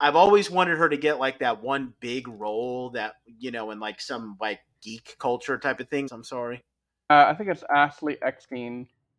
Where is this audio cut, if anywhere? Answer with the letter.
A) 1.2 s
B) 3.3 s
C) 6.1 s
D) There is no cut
C